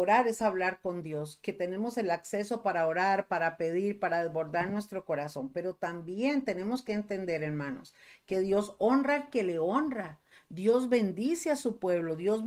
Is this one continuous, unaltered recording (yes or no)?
yes